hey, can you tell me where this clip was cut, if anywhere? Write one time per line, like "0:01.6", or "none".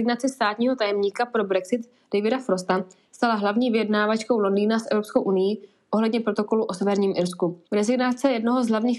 0:07.6

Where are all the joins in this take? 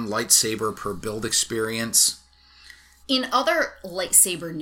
0:03.0

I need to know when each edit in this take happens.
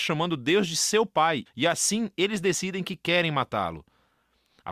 0:01.5

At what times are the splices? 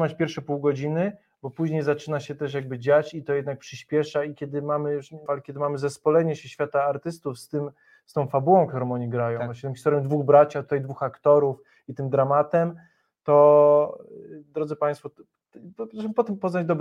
0:05.3

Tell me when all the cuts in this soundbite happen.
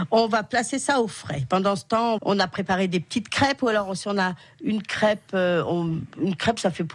0:02.2

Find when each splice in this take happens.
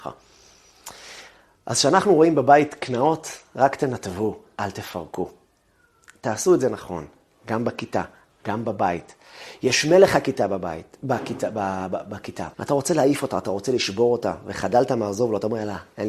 0:12.5

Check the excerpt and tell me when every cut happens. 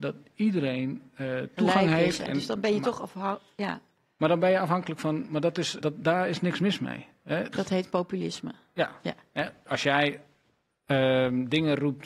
0:02.3
0:05.8
0:07.5

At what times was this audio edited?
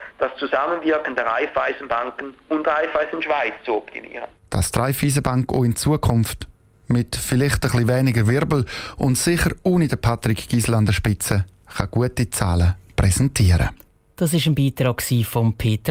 none

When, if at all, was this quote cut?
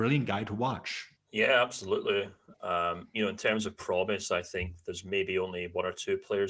0:01.2
0:02.5

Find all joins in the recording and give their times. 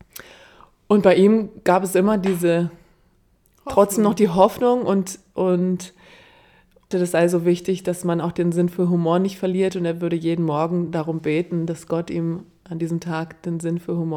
0:06.9

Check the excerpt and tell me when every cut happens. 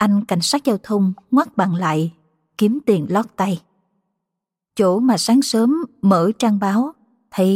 none

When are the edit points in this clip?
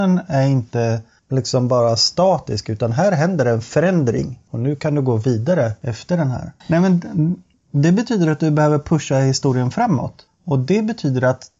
0:06.6

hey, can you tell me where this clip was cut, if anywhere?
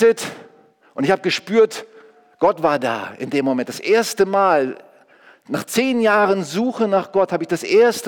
none

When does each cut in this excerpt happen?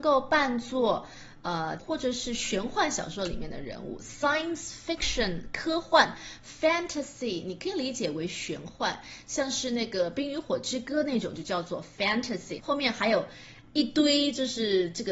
0:01.8
0:12.6

